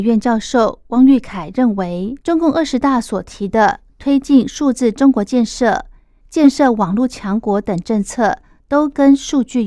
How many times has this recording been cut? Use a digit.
2